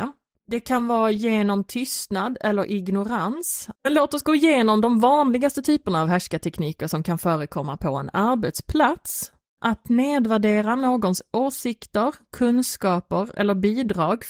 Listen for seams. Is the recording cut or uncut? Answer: cut